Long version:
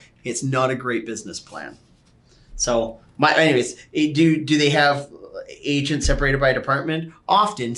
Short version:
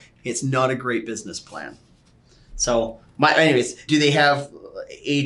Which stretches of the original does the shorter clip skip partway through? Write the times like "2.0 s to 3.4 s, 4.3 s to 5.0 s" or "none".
3.9 s to 4.5 s